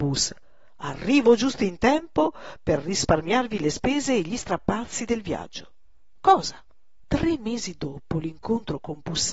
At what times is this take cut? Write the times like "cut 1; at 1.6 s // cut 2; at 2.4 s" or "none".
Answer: cut 1; at 7.0 s